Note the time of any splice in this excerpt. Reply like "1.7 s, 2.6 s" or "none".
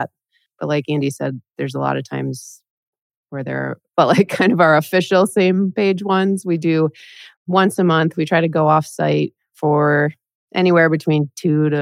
3.9 s